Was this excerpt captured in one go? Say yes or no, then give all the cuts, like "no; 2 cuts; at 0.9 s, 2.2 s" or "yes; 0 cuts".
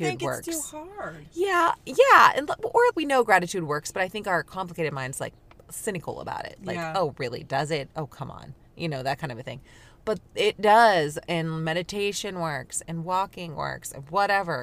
no; 1 cut; at 2.9 s